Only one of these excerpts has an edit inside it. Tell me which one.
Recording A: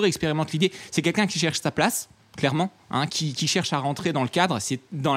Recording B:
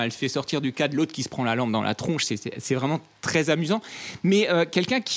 A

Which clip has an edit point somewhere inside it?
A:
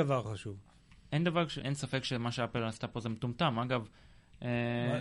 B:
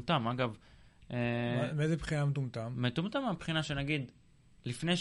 A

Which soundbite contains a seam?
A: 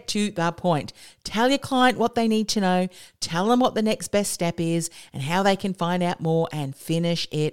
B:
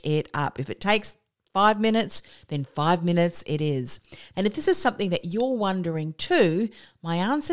B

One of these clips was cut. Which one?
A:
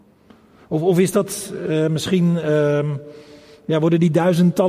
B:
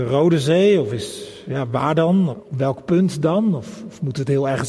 B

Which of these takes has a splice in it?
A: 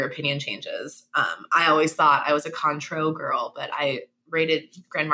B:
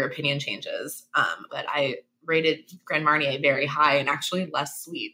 B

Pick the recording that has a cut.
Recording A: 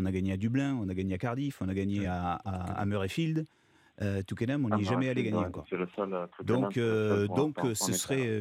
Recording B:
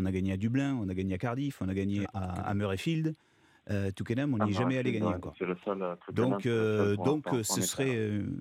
B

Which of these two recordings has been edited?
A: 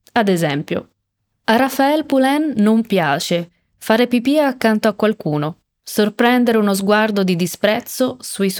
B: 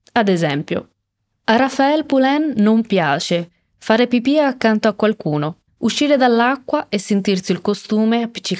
B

